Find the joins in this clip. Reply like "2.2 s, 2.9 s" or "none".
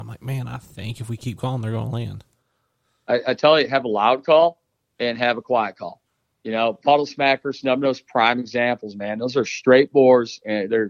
none